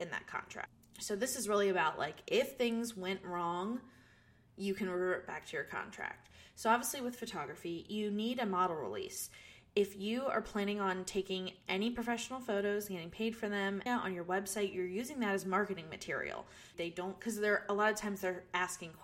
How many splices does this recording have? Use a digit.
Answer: 2